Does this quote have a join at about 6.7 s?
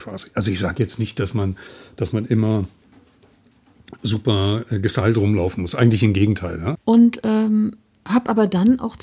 yes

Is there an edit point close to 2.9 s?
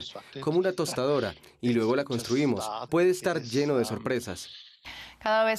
yes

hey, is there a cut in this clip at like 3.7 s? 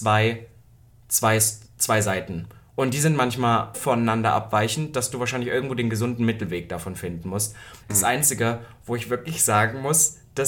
yes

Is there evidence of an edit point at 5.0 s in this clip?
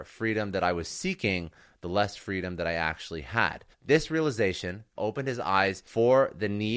yes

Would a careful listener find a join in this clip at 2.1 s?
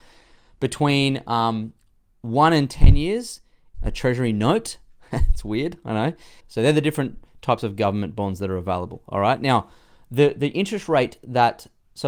no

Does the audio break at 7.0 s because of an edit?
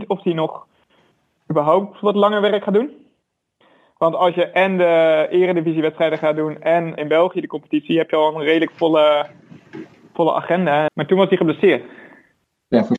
yes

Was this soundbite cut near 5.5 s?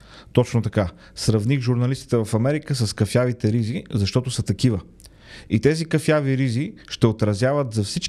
no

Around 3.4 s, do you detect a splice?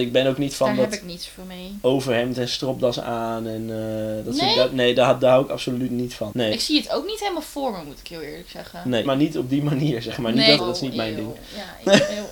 no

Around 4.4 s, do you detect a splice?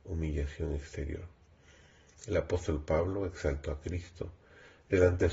no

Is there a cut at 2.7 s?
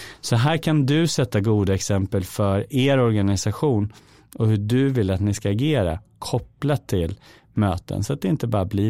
no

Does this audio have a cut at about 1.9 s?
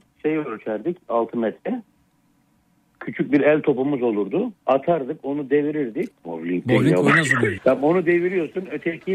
no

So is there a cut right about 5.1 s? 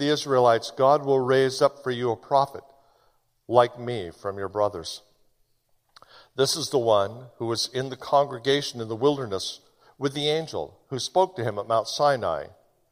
no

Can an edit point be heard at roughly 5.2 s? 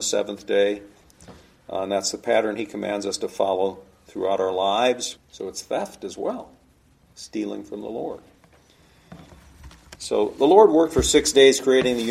yes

